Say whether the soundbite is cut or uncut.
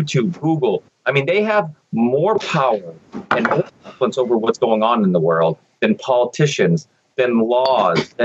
uncut